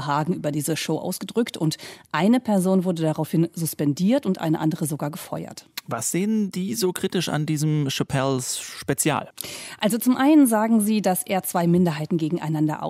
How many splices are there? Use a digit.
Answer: 0